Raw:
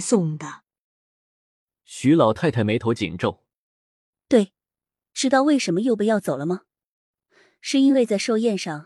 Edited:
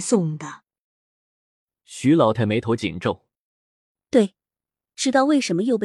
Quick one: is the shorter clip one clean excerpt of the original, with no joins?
no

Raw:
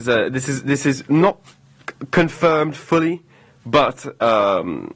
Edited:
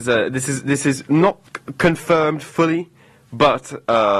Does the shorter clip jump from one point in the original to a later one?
yes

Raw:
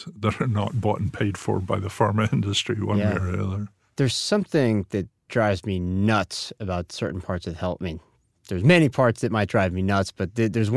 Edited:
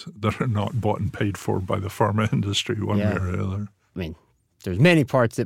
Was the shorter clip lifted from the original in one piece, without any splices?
no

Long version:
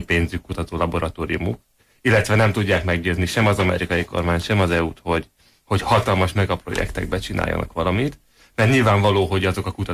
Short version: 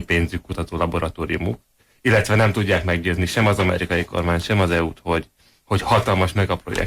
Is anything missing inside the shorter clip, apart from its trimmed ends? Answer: no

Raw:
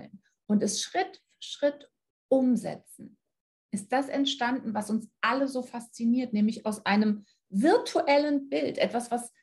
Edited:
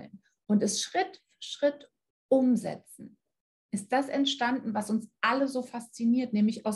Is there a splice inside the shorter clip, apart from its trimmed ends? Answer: no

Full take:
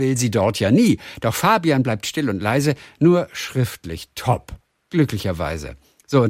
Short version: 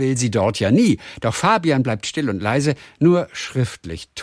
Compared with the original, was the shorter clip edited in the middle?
no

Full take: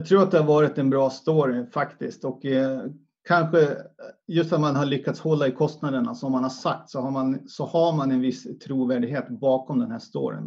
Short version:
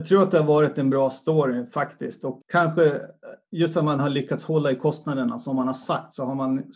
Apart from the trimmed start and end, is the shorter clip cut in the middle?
yes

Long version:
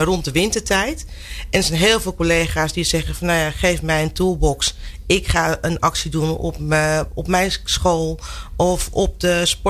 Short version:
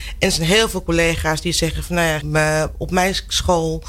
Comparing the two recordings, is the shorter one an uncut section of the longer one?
no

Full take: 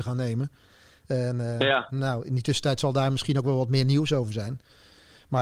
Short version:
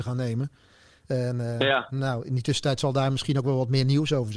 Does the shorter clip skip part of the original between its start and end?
no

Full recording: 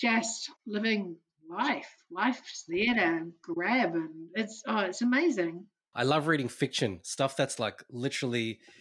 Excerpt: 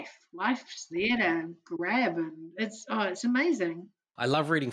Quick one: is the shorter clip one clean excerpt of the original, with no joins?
yes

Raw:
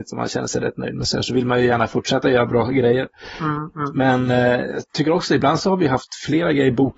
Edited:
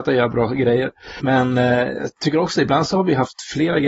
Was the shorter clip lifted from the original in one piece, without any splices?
no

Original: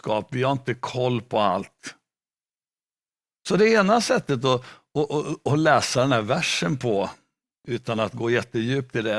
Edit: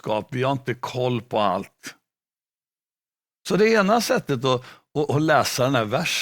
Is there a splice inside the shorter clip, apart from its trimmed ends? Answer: yes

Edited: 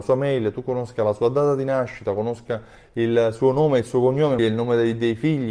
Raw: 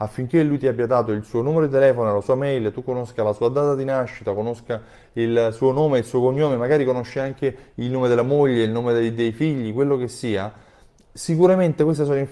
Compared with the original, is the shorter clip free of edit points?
no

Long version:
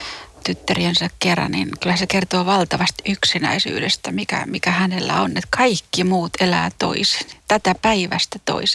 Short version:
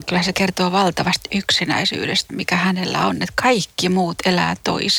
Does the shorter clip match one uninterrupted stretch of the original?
no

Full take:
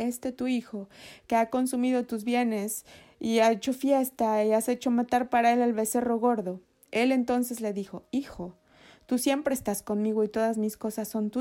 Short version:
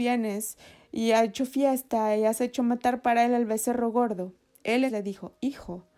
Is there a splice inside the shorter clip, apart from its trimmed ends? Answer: yes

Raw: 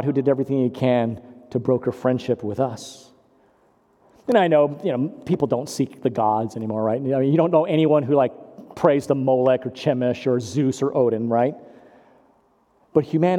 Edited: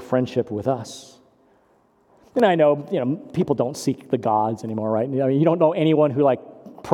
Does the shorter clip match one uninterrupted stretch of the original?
yes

